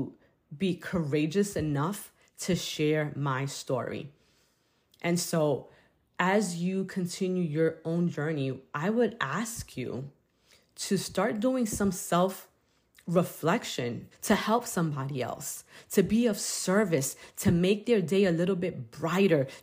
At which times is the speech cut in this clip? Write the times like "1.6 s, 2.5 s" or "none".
14.1 s